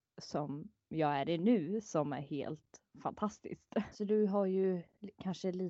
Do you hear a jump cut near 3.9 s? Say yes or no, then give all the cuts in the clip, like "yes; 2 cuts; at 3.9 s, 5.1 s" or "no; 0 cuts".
yes; 1 cut; at 3.9 s